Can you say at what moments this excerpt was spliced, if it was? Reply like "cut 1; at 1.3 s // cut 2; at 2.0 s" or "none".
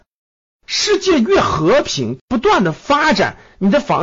cut 1; at 2.2 s